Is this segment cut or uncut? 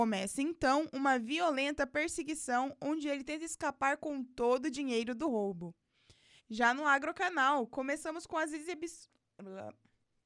cut